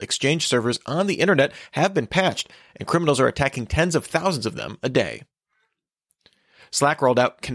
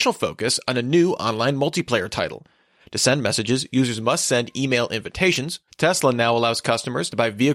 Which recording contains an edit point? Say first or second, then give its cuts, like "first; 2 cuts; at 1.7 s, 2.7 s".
second; 2 cuts; at 2.8 s, 5.7 s